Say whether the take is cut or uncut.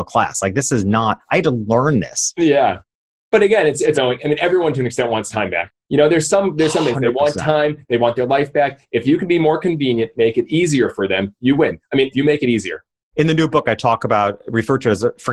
cut